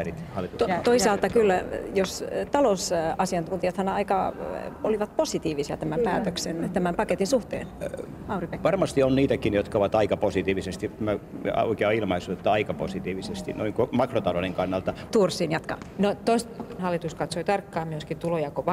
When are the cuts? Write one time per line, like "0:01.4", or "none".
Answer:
0:15.1
0:16.8